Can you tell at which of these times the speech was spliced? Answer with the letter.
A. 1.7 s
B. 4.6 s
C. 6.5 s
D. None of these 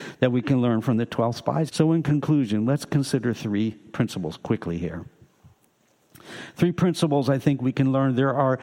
A